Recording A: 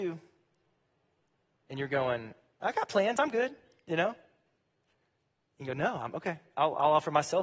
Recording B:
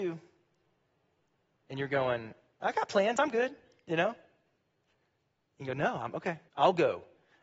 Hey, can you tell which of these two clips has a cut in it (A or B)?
B